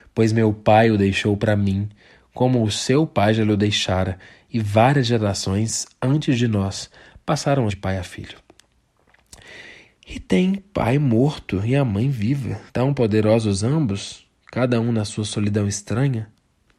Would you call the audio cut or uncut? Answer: cut